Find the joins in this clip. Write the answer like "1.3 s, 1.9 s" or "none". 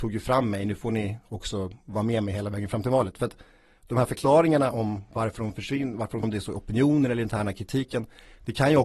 6.2 s

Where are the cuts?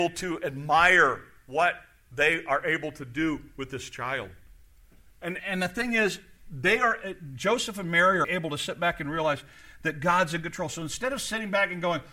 5.4 s, 8.2 s

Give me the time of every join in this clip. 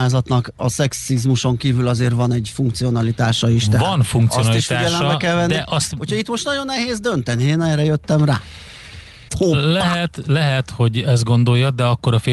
9.3 s

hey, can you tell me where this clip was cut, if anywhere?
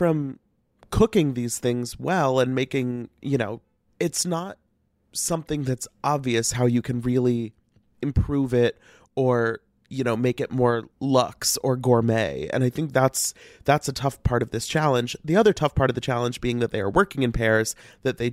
3.9 s, 10.9 s

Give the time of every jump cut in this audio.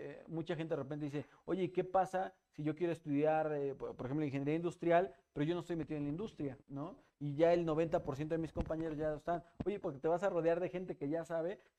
6.6 s, 9.8 s

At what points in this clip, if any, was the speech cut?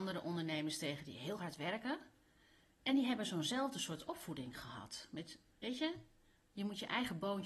none

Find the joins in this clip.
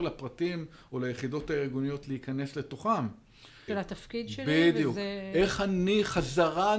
3.7 s

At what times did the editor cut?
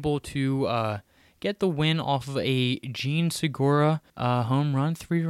4.1 s

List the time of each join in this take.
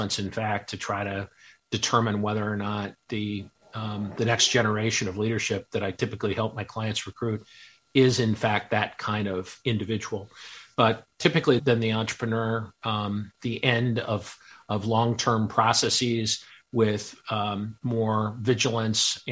11.6 s, 13.3 s

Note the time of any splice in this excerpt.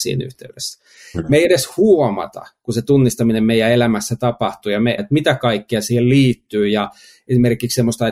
5.0 s

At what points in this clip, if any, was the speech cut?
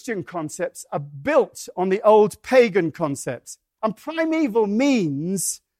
3.8 s

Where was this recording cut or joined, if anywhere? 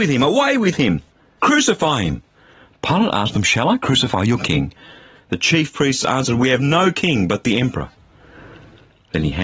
none

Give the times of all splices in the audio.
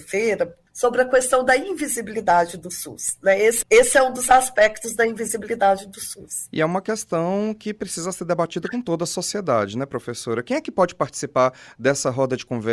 3.6 s

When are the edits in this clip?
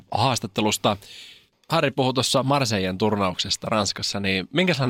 none

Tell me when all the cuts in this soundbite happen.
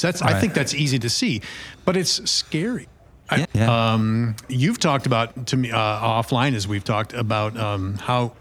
3.4 s

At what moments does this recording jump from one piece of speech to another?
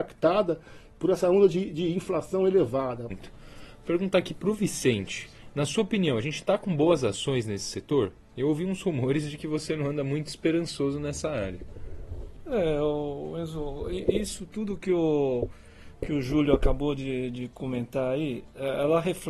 3.1 s

